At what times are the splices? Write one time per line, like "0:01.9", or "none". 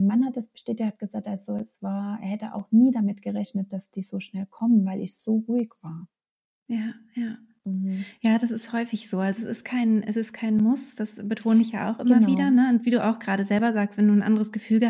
none

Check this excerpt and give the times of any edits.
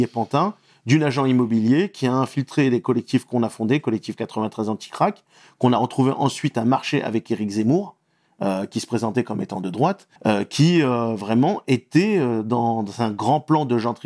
0:10.2

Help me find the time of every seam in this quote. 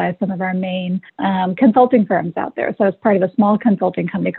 0:01.1

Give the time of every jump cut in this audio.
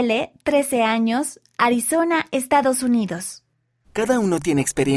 0:03.8

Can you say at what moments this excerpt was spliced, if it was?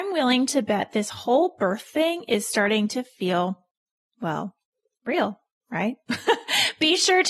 none

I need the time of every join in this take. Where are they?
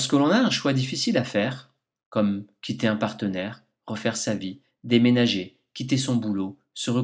none

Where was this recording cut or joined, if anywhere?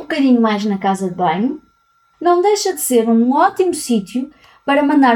0:02.1

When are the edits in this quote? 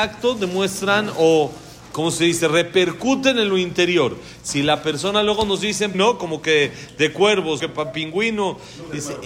0:01.9
0:05.9
0:07.6

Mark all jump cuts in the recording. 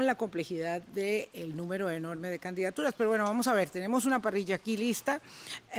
none

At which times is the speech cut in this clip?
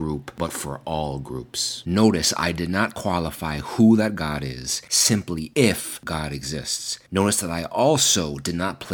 0:01.8

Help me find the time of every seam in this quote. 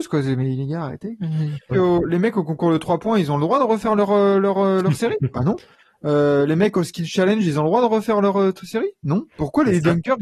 0:01.7

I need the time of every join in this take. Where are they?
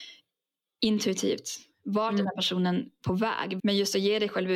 0:03.6

